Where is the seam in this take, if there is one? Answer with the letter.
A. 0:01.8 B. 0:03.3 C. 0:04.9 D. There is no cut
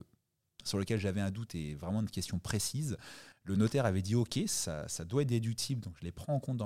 B